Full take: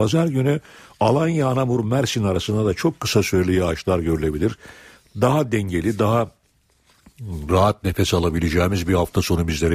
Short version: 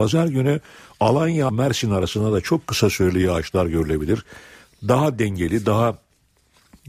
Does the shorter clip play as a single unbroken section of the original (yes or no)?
no